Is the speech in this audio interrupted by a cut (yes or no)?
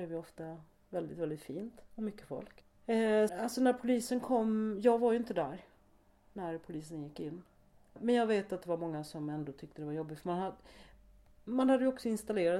yes